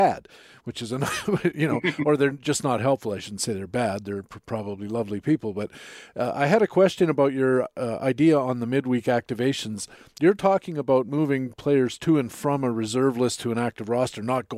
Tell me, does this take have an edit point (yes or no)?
no